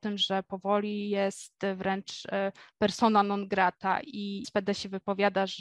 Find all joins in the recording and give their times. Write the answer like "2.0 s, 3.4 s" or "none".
4.4 s